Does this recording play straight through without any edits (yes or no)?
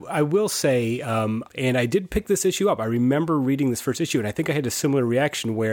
no